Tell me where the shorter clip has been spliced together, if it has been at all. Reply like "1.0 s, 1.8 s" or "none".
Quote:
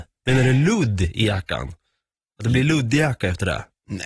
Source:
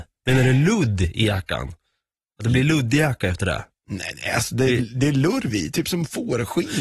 none